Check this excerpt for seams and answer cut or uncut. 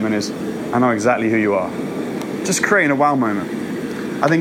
cut